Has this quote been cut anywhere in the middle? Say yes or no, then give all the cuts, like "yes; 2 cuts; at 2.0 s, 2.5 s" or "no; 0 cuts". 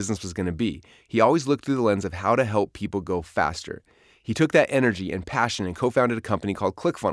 no; 0 cuts